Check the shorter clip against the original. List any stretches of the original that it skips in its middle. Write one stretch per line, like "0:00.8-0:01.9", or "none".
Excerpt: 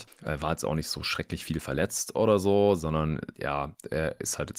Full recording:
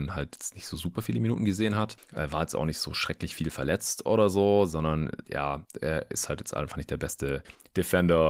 none